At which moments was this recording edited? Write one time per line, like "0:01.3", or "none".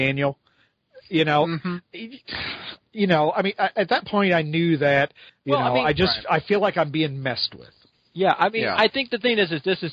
0:05.3